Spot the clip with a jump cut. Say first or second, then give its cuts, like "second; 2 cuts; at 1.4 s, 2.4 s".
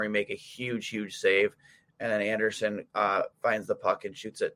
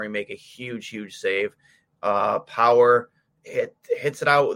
first; 1 cut; at 1.9 s